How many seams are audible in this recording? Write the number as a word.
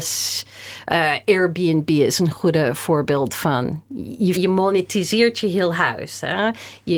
one